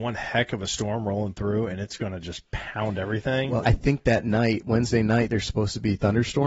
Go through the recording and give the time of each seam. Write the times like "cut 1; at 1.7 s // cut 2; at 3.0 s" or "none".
cut 1; at 3.6 s